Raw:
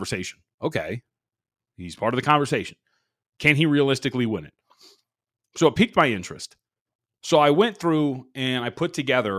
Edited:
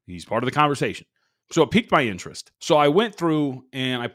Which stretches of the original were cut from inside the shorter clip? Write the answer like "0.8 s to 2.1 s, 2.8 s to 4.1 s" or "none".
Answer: 3.1 s to 5.5 s, 6.6 s to 7.2 s